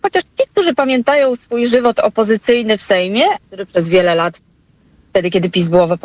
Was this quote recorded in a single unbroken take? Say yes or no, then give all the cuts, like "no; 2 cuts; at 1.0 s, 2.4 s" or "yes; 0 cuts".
no; 1 cut; at 3.4 s